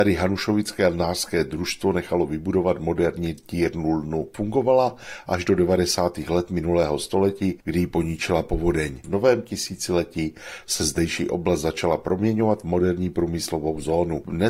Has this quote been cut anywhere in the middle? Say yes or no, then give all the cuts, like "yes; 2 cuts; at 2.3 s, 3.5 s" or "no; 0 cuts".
no; 0 cuts